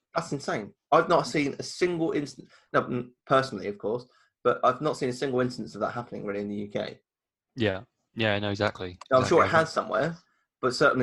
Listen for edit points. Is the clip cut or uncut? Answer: uncut